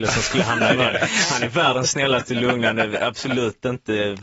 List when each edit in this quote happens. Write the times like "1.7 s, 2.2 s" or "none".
none